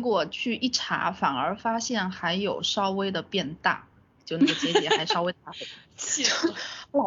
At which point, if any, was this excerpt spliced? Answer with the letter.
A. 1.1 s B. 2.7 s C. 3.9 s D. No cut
D